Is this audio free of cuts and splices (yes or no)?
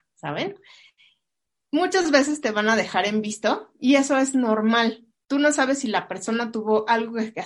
yes